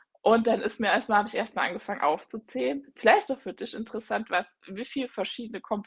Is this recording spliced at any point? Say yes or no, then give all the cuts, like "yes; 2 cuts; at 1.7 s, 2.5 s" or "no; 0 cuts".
no; 0 cuts